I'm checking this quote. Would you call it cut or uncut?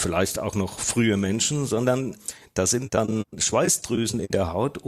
uncut